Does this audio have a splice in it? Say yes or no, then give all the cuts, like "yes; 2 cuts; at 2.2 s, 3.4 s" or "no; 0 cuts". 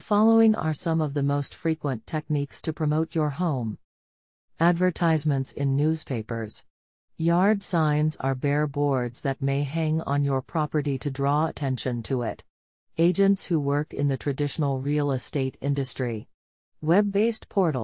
no; 0 cuts